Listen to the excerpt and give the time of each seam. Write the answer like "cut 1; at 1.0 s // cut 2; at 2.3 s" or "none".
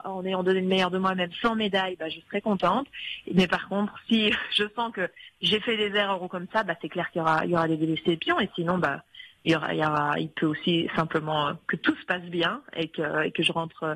none